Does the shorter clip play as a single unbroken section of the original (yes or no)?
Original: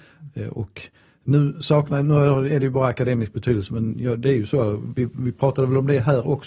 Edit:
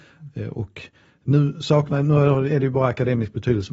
yes